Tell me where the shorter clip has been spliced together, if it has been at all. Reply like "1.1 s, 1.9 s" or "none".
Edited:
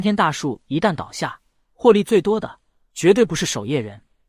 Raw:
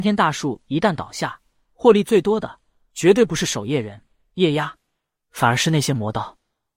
none